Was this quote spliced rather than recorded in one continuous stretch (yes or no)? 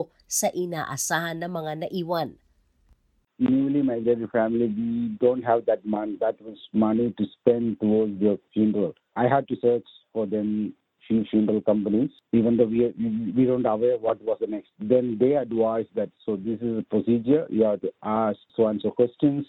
no